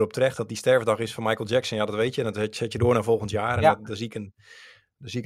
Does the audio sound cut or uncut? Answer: uncut